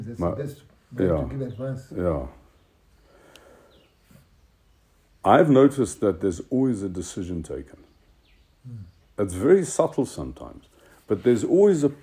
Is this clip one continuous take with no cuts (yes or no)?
yes